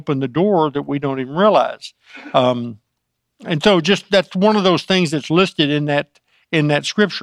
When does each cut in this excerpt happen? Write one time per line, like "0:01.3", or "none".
none